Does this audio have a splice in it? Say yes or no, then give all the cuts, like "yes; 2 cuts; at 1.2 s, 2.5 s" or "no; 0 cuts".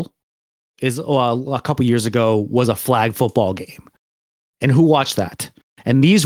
no; 0 cuts